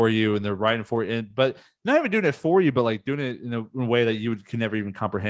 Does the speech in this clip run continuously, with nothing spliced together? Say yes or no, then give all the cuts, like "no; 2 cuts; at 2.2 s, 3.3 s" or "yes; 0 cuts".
yes; 0 cuts